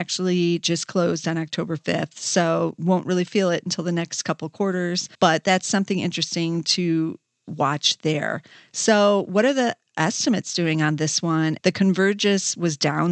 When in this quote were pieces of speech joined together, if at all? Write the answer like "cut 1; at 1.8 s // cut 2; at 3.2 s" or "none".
cut 1; at 5.1 s // cut 2; at 11.6 s